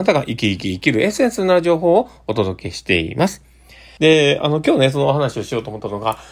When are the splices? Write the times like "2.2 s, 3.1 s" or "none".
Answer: 4.0 s